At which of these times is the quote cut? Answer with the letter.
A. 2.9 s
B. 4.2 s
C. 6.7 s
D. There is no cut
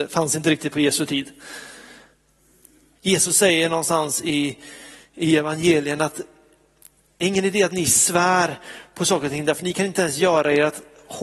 A